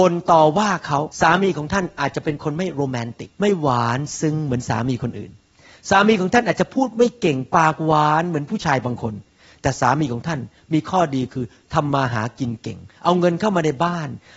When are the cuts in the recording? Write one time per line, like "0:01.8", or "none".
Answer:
0:01.1
0:03.3

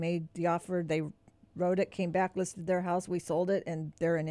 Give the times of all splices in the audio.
none

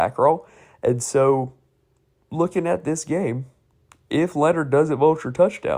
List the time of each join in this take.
none

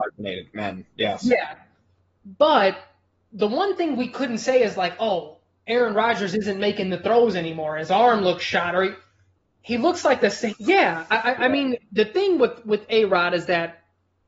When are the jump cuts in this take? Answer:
0:10.5

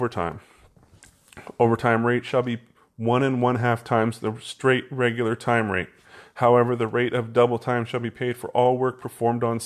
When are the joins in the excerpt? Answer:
none

